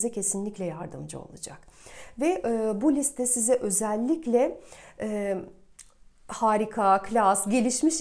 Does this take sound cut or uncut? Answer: uncut